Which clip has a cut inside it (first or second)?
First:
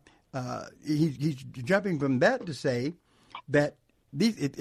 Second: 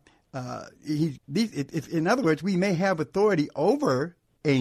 second